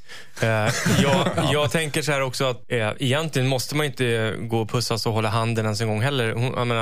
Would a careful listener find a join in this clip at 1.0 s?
no; 1 cut; at 2.6 s

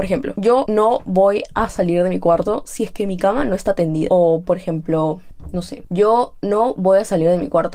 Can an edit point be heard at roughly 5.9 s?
no; 0 cuts

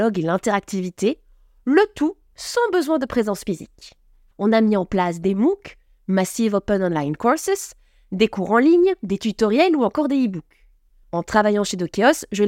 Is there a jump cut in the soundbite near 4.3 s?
yes; 2 cuts; at 4.3 s, 11.0 s

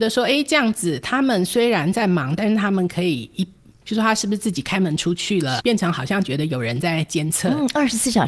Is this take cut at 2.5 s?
no; 2 cuts; at 3.8 s, 5.6 s

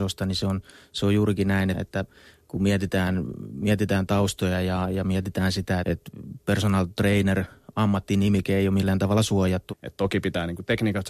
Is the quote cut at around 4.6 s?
no; 3 cuts; at 1.7 s, 5.8 s, 9.7 s

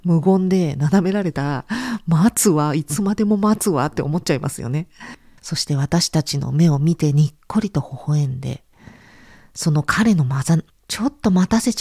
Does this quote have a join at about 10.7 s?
yes; 2 cuts; at 5.4 s, 10.7 s

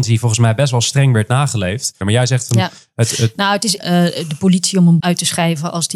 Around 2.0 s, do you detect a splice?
yes; 3 cuts; at 2.0 s, 3.8 s, 5.0 s

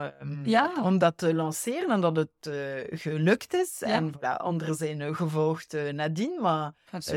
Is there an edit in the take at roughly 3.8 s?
no; 0 cuts

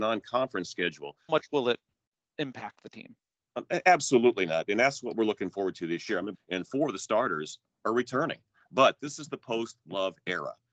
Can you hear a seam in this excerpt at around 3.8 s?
no; 2 cuts; at 1.3 s, 6.3 s

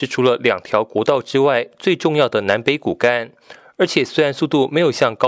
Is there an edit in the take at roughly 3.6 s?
no; 0 cuts

